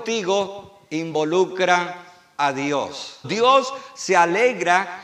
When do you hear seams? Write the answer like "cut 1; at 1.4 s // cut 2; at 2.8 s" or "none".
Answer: cut 1; at 3.2 s